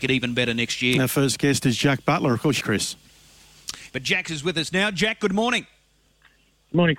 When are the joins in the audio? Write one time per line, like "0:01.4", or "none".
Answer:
0:02.6
0:03.9